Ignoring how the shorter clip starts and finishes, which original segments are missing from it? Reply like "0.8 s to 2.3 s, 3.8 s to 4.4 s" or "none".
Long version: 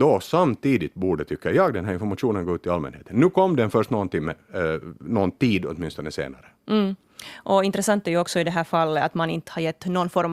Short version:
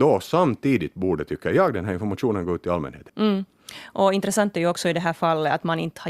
3.1 s to 6.6 s